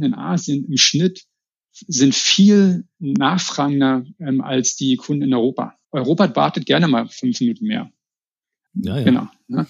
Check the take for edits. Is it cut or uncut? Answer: cut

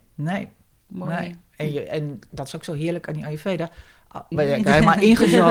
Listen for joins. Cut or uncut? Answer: cut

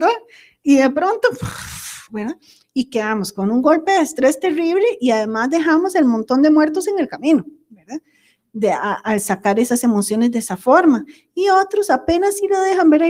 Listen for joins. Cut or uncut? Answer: uncut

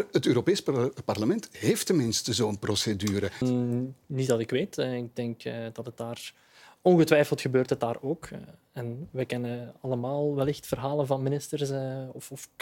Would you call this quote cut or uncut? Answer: cut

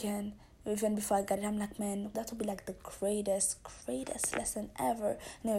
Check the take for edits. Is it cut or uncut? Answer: cut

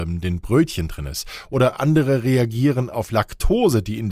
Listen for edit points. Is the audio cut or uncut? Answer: uncut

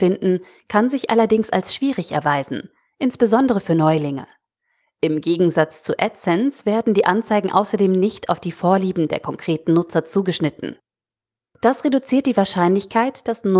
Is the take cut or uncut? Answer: uncut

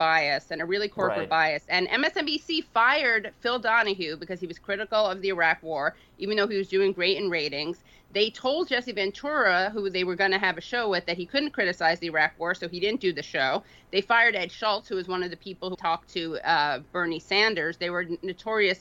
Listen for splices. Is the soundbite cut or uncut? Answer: cut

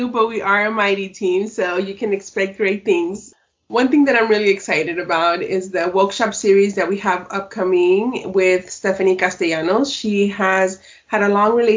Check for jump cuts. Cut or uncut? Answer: uncut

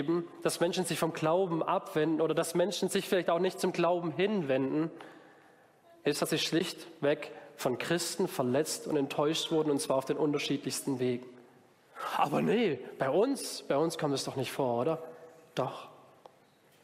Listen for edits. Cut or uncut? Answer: uncut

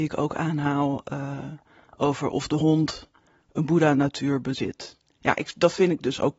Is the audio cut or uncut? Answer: uncut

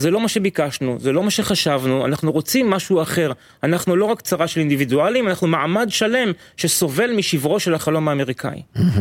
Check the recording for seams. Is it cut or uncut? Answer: uncut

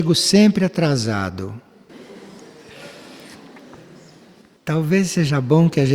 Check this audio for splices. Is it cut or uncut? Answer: cut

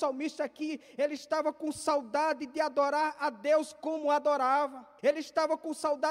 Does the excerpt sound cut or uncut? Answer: cut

